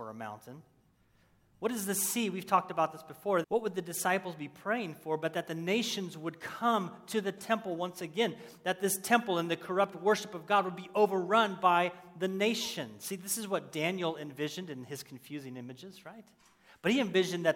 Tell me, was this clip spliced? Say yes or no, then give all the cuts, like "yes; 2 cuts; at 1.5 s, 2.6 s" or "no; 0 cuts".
yes; 1 cut; at 3.4 s